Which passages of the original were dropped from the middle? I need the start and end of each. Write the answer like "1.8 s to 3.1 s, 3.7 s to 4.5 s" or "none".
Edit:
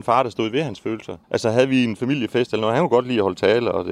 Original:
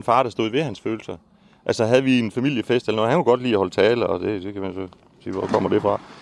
1.2 s to 1.6 s